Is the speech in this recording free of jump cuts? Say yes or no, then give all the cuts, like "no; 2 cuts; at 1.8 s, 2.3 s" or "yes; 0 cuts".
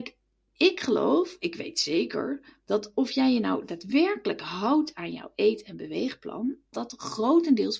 no; 1 cut; at 6.7 s